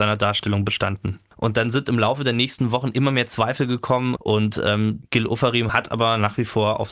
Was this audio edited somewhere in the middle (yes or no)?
yes